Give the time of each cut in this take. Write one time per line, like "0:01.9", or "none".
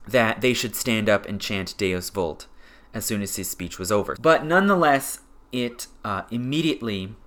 0:04.2